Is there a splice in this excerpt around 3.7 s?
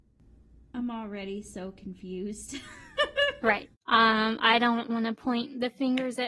yes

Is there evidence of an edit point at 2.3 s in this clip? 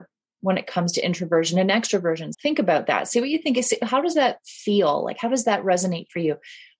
yes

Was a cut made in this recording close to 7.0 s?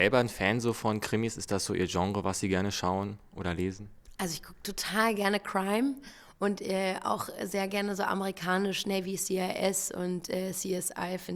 no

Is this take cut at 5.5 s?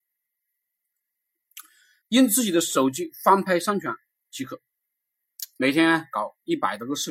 no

